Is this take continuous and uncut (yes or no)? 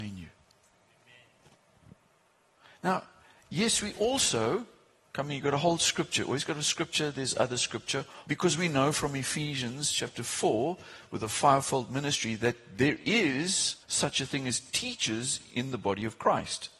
no